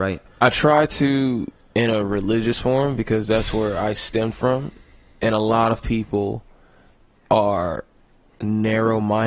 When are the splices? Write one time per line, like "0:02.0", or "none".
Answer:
none